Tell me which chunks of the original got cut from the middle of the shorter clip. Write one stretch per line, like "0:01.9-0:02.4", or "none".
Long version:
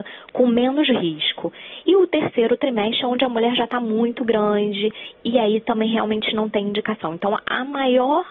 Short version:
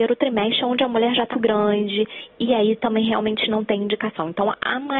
0:03.7-0:04.2